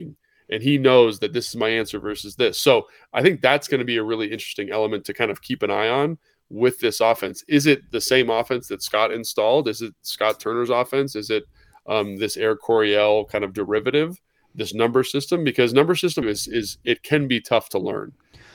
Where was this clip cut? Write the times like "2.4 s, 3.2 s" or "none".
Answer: 16.2 s